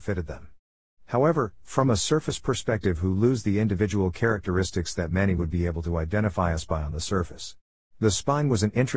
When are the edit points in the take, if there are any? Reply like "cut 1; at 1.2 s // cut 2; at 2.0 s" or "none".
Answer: cut 1; at 7.9 s